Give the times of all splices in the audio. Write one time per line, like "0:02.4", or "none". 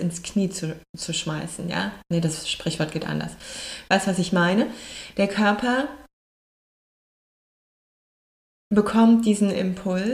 0:05.1